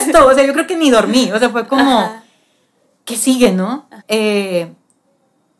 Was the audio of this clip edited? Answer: yes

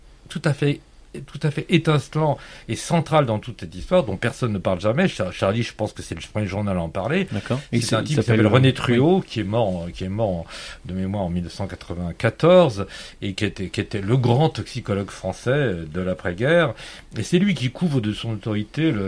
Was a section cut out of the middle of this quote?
no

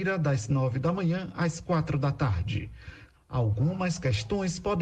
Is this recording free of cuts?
no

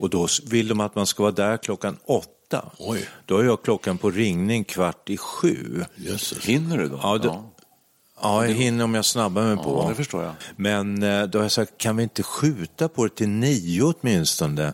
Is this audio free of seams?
yes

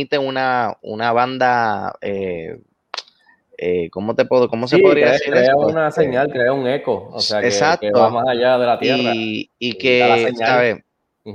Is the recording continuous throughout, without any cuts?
yes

